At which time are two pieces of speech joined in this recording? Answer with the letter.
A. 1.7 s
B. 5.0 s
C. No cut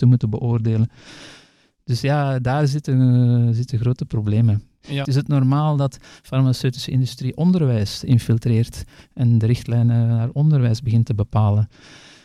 B